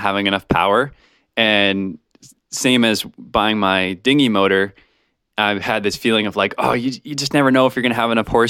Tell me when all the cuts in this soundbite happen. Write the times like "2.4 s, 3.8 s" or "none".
none